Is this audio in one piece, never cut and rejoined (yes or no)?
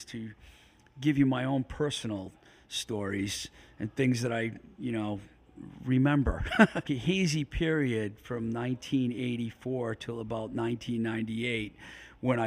no